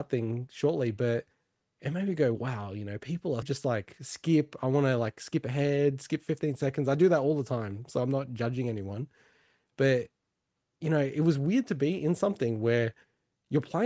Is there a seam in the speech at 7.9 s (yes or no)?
no